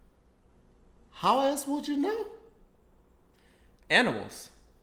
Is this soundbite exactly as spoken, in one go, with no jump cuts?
yes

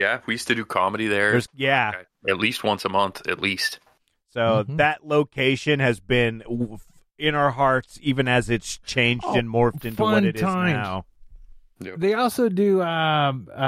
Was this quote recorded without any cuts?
yes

